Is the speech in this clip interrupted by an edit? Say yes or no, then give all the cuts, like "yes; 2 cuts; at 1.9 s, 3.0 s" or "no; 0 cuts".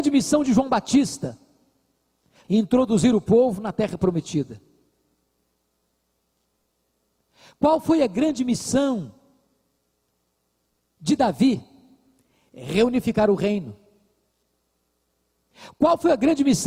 yes; 1 cut; at 2.4 s